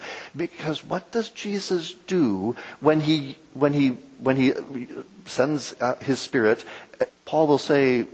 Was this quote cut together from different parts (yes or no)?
yes